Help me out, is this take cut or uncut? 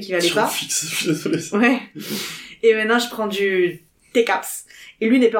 uncut